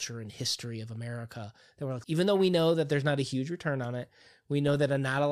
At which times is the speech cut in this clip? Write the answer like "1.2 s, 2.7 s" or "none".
2.0 s

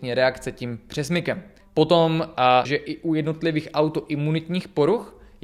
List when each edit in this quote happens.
1.6 s, 2.6 s

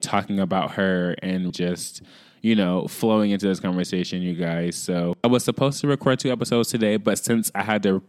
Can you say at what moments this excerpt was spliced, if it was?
1.5 s

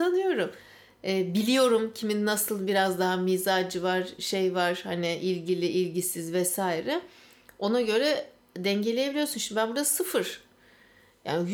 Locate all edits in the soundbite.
none

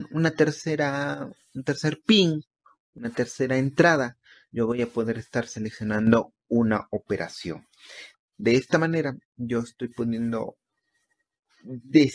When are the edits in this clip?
none

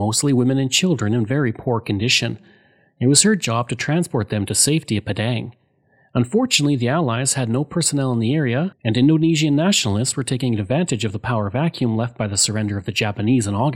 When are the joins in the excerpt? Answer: none

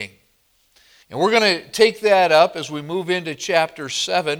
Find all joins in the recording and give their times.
1.0 s

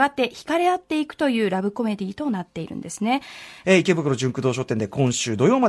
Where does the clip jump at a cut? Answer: 3.6 s

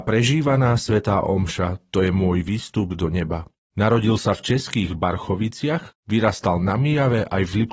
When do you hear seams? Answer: 3.6 s

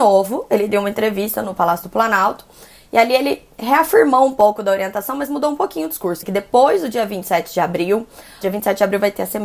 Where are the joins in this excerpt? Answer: 6.2 s, 8.4 s

